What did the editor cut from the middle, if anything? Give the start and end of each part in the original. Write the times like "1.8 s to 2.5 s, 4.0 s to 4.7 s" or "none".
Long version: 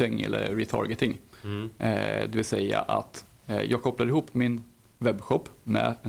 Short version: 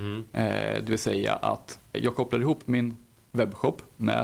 3.4 s to 3.6 s